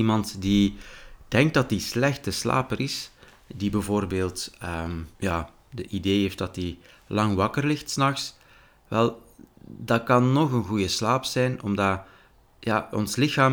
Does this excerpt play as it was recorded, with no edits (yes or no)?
no